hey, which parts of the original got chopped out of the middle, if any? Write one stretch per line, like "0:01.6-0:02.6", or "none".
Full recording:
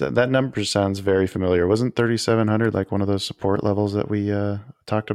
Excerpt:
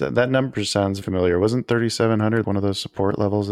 0:01.0-0:01.3
0:02.7-0:02.9